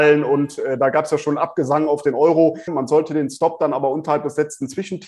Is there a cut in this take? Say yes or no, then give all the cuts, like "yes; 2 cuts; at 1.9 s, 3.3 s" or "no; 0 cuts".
yes; 1 cut; at 2.7 s